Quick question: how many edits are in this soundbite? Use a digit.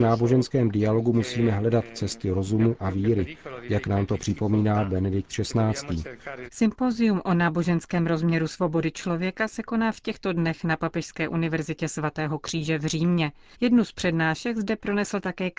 2